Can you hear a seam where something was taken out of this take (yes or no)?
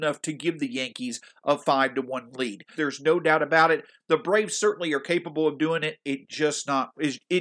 yes